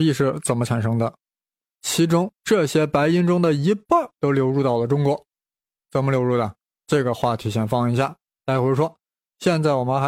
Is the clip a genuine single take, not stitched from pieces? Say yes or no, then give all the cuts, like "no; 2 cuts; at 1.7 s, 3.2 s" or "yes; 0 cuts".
no; 1 cut; at 1.6 s